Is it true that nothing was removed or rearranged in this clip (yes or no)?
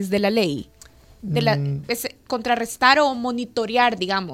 yes